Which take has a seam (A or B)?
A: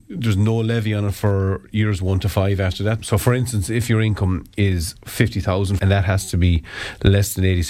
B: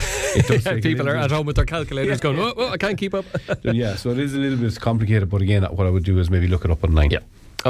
A